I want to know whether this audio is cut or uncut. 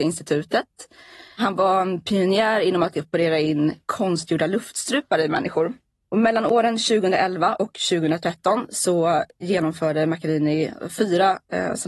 uncut